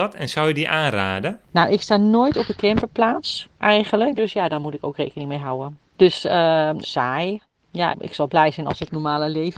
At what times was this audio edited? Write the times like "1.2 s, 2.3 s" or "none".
4.2 s, 6.8 s, 7.9 s